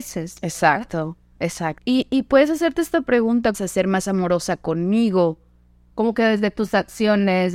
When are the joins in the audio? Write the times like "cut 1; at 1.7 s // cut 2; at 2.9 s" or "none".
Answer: cut 1; at 1.8 s // cut 2; at 3.5 s // cut 3; at 5.9 s